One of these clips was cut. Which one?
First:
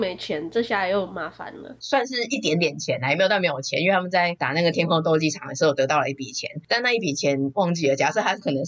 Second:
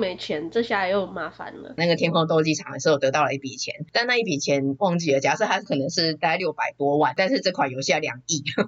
second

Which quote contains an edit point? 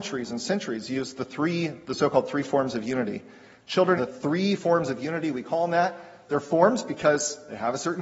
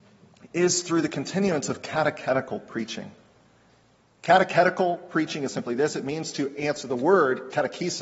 first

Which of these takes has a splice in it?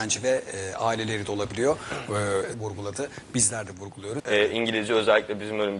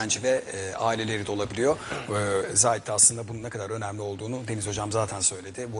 first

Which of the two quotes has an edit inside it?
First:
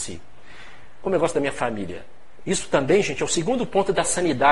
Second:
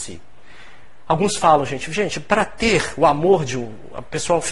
first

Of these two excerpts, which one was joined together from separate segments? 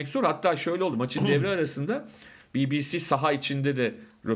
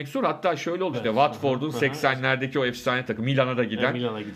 second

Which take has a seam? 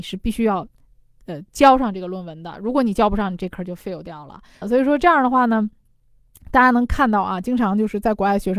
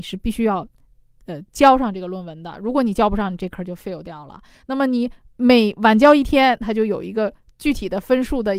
first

